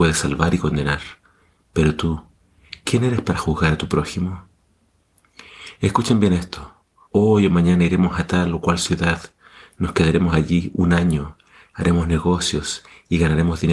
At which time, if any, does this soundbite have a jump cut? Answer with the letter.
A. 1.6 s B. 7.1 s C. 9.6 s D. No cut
B